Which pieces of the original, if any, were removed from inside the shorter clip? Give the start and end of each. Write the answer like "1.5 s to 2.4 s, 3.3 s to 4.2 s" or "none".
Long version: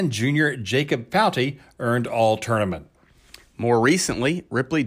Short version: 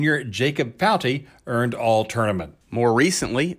2.9 s to 3.5 s